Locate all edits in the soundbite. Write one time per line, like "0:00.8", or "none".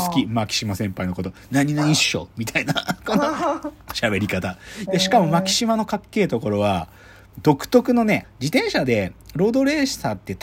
0:04.9
0:08.2